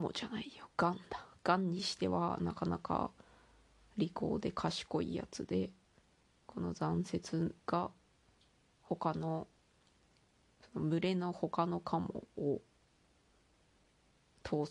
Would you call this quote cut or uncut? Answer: cut